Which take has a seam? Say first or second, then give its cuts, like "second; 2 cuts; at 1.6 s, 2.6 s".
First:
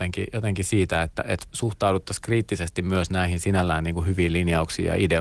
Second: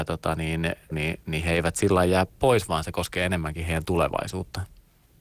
second; 1 cut; at 0.9 s